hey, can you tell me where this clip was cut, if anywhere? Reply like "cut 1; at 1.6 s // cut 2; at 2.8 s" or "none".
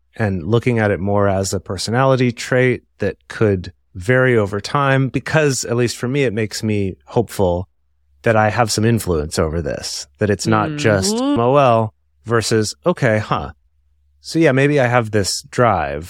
cut 1; at 11.4 s